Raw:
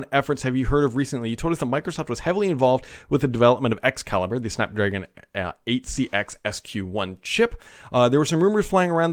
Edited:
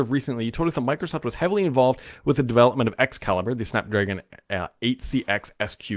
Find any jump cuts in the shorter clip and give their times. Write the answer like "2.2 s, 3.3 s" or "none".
none